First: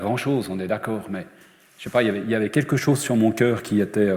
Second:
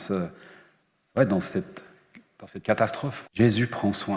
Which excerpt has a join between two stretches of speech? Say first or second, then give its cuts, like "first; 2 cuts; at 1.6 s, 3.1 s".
second; 1 cut; at 3.2 s